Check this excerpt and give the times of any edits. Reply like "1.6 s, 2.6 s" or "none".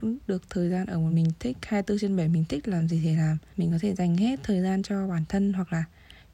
1.1 s